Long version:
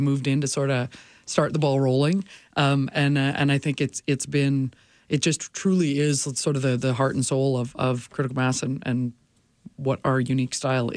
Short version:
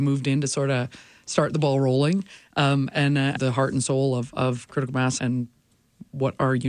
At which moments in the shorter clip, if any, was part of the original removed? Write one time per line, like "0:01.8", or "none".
0:03.4
0:05.2